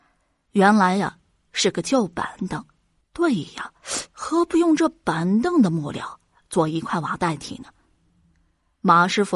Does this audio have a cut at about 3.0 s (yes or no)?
yes